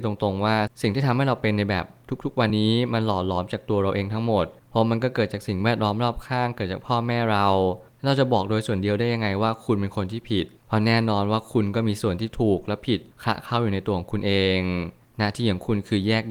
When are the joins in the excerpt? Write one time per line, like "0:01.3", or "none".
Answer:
0:02.5